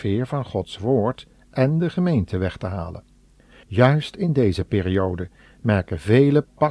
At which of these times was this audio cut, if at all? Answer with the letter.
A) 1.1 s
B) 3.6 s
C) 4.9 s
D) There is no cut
B